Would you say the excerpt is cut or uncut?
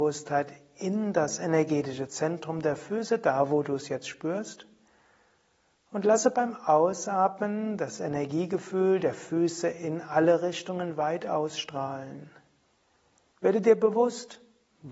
cut